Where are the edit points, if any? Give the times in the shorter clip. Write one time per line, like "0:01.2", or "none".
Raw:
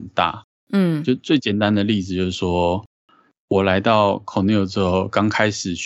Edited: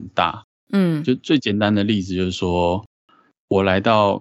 none

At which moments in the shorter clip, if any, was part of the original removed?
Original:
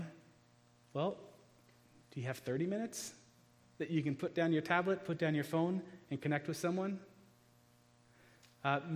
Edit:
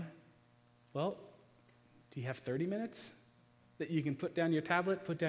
none

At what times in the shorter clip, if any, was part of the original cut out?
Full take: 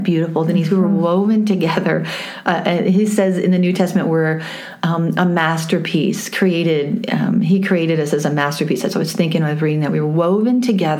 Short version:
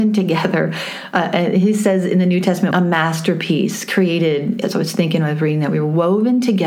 0:02.7
0:04.6

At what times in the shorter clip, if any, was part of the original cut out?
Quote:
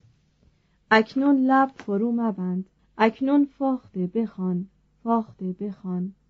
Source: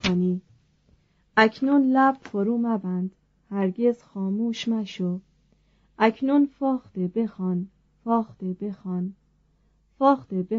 0:02.8

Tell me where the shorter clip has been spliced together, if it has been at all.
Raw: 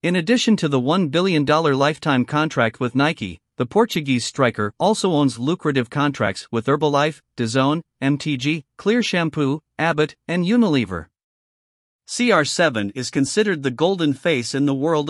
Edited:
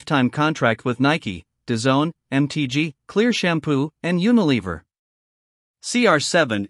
0:01.5
0:04.0

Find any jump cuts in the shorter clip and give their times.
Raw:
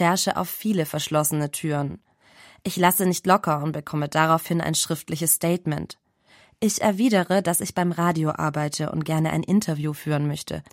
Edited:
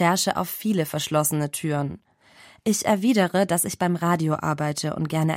0:02.6

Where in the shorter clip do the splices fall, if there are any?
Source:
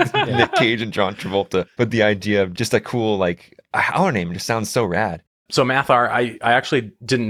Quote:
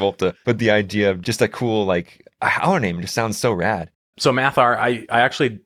none

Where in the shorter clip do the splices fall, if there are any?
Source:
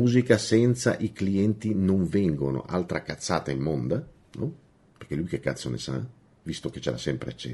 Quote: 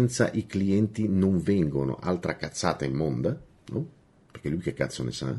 none

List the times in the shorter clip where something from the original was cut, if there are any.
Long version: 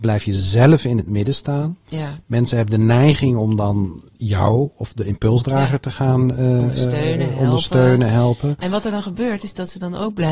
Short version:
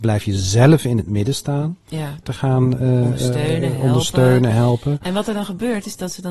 0:02.2

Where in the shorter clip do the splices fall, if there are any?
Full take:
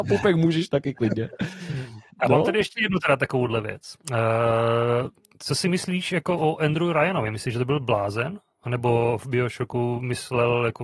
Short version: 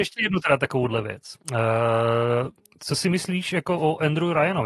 none

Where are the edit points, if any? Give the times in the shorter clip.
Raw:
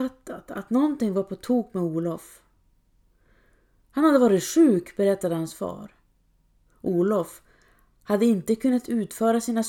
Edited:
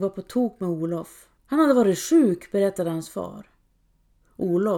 0:01.4

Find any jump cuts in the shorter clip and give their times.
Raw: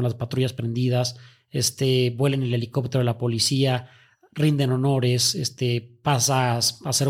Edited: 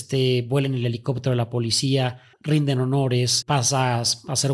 0:02.3
0:03.4

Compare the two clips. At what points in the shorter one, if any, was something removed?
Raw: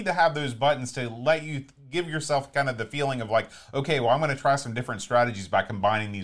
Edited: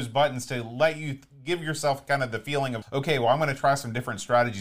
0:02.8

